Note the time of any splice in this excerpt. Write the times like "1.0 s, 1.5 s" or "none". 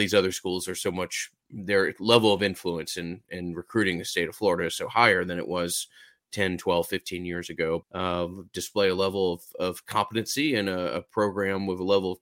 7.8 s